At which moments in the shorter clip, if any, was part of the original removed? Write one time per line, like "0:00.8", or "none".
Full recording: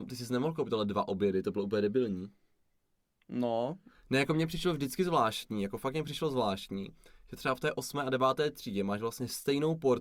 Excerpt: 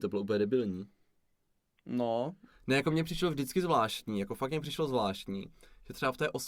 none